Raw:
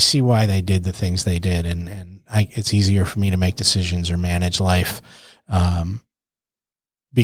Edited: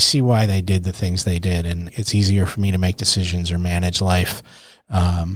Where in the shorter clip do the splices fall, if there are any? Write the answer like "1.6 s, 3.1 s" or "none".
1.9 s